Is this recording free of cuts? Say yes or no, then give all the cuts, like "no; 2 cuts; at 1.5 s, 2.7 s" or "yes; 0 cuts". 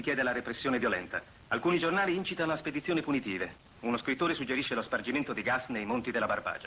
no; 1 cut; at 1.5 s